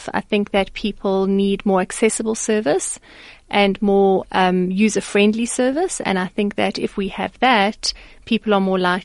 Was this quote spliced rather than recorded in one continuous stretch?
no; 0 cuts

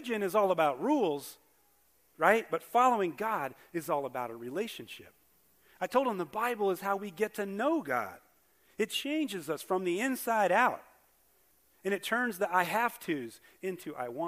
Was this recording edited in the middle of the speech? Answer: no; 0 cuts

